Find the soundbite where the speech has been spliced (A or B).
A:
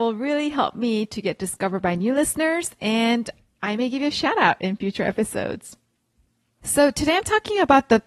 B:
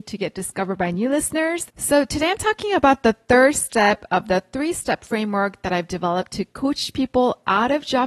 B